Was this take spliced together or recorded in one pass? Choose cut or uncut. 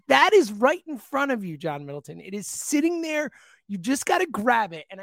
uncut